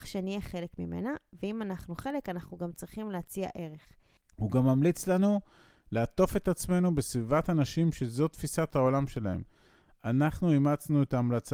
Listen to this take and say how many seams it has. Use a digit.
1